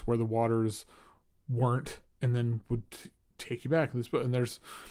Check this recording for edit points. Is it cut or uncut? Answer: uncut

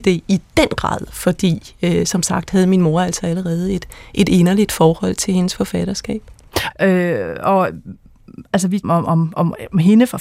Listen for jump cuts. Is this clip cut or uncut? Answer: cut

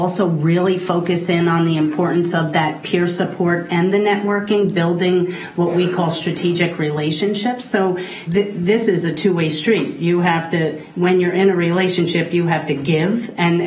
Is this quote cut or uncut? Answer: cut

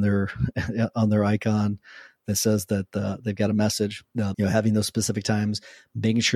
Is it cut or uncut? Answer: cut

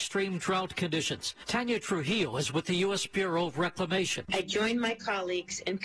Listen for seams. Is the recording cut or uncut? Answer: uncut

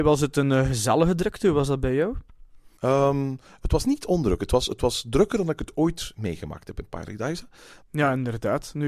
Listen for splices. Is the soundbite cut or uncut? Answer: cut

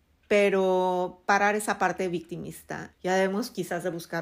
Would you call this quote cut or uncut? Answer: cut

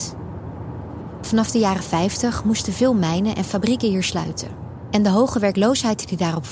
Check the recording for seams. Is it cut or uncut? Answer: uncut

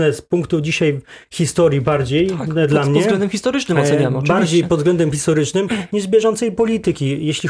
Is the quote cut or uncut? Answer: uncut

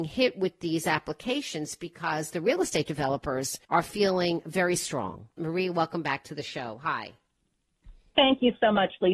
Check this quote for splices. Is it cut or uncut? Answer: cut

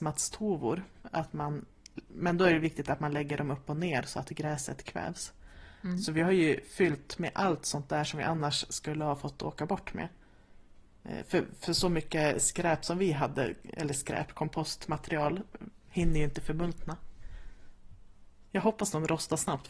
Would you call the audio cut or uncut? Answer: cut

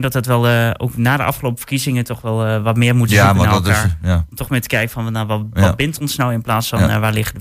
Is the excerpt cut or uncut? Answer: uncut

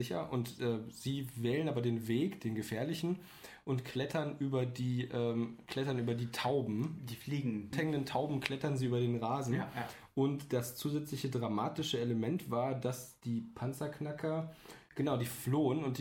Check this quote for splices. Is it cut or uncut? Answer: cut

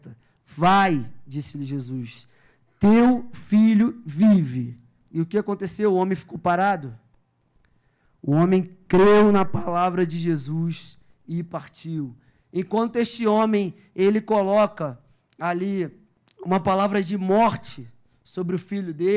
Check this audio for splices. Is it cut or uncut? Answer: uncut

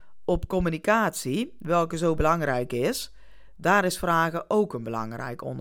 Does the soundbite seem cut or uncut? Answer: uncut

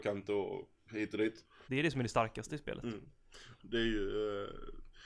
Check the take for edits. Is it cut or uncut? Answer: cut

